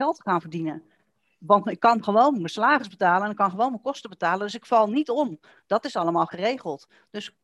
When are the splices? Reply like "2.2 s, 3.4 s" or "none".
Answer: none